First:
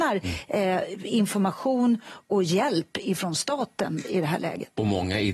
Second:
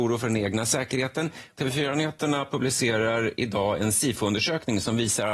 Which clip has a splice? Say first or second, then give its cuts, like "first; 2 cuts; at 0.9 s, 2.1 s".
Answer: second; 1 cut; at 1.5 s